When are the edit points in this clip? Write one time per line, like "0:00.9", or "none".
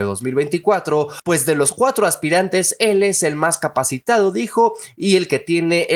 none